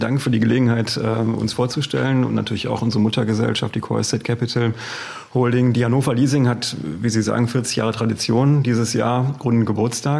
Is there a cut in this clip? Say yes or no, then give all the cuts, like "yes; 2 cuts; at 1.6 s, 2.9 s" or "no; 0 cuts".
no; 0 cuts